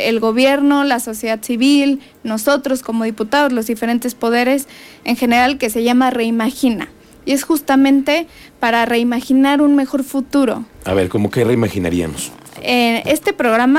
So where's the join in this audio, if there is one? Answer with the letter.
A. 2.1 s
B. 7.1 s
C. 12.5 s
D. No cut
D